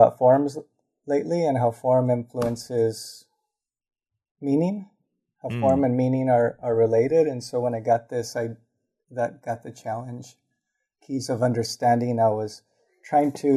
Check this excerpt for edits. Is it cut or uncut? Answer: uncut